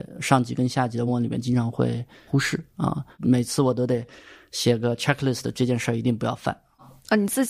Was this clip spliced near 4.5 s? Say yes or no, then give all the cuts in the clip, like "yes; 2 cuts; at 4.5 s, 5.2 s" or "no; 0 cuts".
no; 1 cut; at 1.1 s